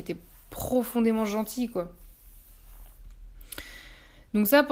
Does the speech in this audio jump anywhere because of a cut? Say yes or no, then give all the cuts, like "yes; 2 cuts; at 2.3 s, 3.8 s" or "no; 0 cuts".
no; 0 cuts